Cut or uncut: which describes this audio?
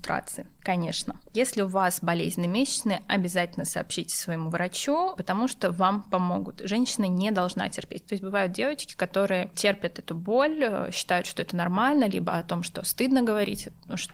uncut